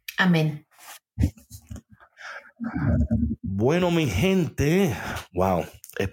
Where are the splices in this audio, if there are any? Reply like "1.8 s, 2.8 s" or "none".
none